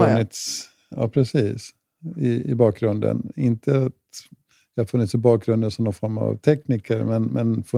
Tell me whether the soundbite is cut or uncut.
uncut